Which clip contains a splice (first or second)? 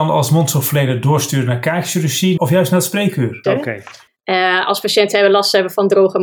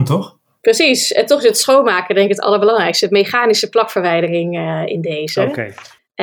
first